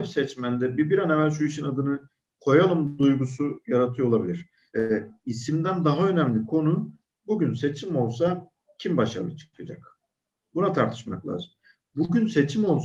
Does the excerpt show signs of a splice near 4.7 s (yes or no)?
yes